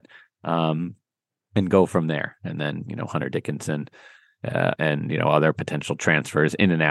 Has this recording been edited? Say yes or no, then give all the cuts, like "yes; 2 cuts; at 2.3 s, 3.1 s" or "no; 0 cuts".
yes; 1 cut; at 4.8 s